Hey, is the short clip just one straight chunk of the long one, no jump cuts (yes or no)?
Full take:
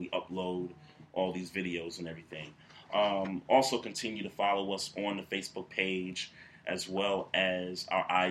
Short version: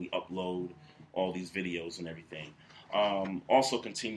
yes